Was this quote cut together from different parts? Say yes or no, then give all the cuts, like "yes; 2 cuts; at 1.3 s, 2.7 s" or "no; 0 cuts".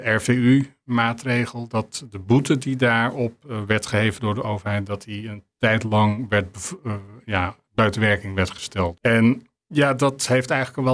yes; 1 cut; at 9.0 s